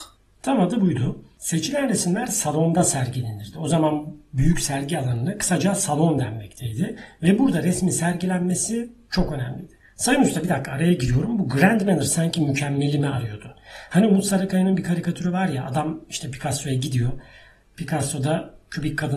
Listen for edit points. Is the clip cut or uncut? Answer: uncut